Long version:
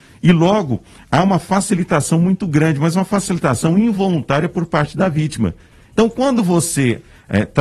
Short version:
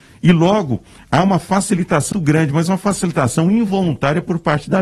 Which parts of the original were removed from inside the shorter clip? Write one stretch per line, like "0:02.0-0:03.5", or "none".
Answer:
0:02.1-0:02.4